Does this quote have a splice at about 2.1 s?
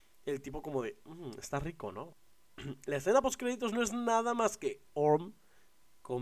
yes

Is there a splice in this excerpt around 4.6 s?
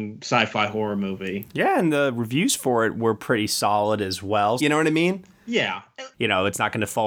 yes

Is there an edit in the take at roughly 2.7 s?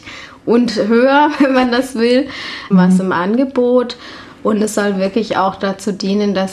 yes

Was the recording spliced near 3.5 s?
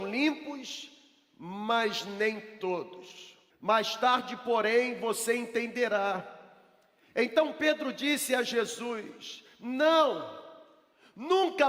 yes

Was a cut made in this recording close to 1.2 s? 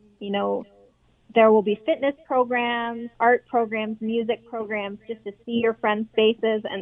no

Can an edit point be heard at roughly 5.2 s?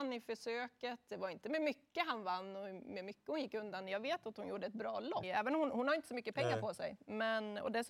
yes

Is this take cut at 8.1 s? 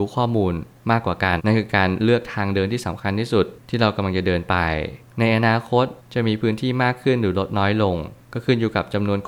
no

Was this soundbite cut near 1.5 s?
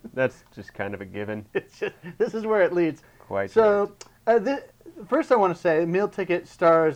no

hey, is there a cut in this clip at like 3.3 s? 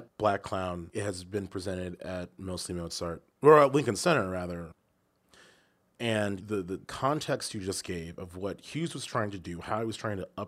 yes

